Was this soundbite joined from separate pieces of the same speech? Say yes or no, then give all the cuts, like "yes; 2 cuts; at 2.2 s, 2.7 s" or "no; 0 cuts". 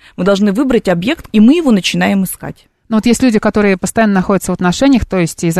yes; 1 cut; at 1.3 s